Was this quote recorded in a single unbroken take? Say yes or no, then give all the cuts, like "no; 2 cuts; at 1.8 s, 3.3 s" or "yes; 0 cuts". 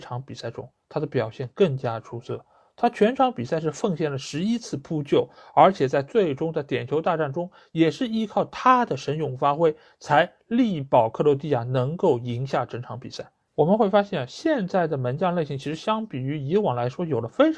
yes; 0 cuts